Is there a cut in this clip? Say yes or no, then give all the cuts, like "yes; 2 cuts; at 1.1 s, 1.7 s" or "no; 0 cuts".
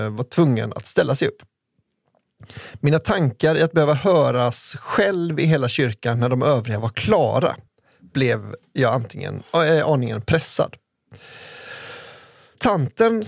no; 0 cuts